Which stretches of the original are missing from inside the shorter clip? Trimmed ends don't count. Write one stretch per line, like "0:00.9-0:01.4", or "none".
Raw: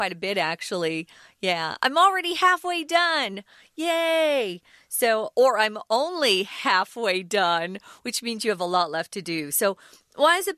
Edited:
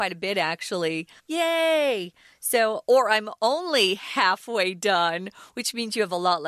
0:01.2-0:03.7